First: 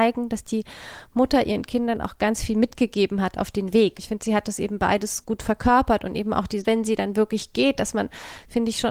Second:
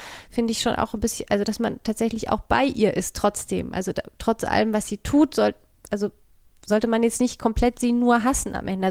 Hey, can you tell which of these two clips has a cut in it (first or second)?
first